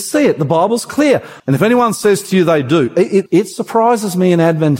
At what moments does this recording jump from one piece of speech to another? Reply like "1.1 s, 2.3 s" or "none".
1.4 s, 3.3 s

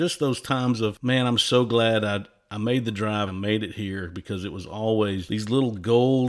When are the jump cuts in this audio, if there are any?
3.3 s, 5.3 s

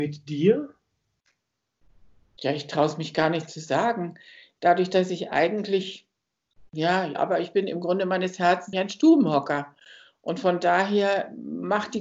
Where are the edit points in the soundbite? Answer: 7.1 s, 8.7 s

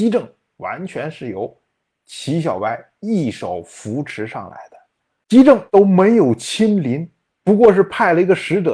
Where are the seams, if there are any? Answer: 5.7 s

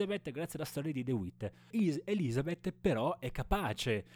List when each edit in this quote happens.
1.7 s

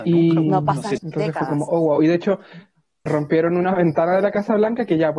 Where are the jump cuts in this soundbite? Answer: 1.0 s, 3.1 s

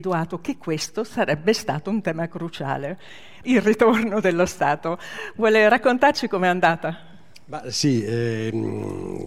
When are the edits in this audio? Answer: 3.4 s

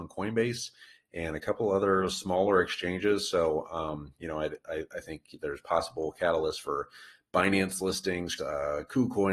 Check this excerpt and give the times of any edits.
8.4 s

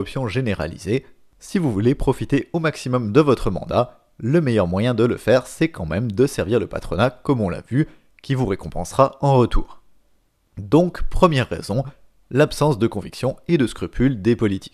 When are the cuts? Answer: none

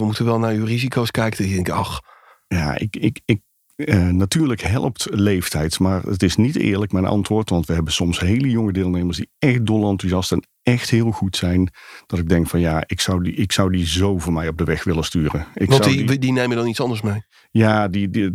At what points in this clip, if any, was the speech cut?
none

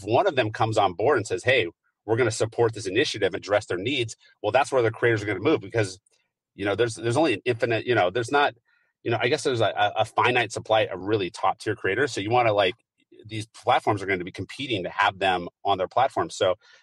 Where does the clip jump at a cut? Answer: 3.4 s

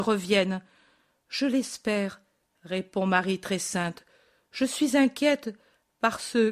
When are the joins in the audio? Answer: 1.2 s

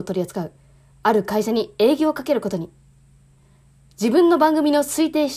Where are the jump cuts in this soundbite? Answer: none

